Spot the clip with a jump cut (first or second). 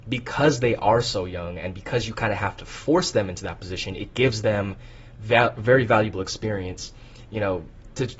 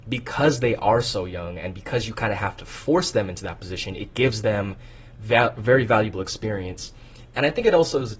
first